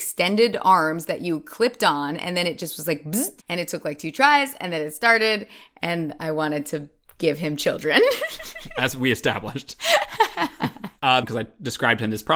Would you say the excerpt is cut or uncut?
cut